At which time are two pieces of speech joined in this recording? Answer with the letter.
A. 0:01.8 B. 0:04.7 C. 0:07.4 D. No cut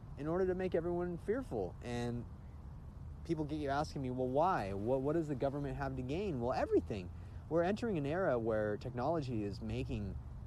D